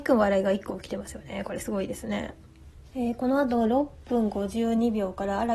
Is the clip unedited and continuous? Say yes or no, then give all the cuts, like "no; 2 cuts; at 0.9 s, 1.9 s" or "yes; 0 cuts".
yes; 0 cuts